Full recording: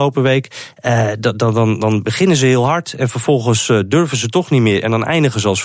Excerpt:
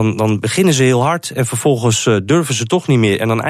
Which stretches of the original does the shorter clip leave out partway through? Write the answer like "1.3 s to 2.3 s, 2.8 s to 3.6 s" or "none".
none

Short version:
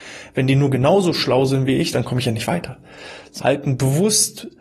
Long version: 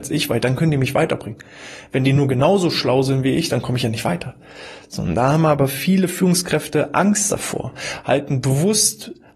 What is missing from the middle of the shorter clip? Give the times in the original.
5.0 s to 8.0 s

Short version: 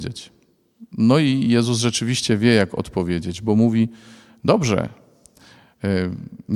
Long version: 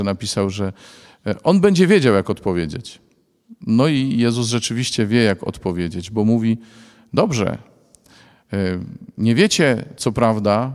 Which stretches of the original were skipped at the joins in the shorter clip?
none

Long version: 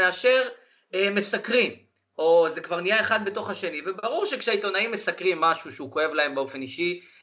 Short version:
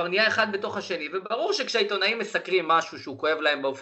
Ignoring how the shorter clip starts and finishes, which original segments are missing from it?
none

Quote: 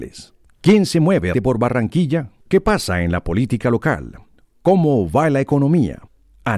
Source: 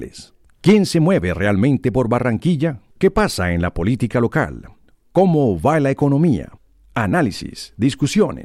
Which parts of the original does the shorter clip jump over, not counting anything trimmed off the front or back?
1.3 s to 1.8 s

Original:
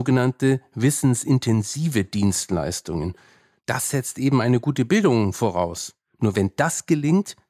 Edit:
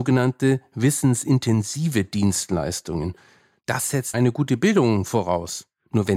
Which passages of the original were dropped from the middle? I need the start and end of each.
4.1 s to 4.4 s

